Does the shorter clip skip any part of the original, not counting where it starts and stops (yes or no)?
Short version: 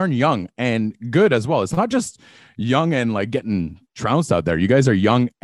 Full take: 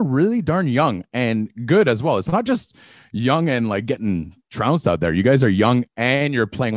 no